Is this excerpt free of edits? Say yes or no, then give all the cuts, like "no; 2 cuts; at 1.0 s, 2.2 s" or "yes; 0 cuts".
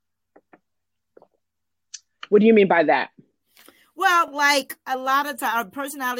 yes; 0 cuts